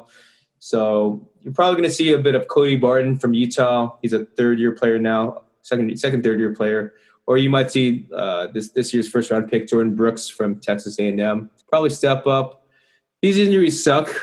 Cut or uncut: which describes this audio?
cut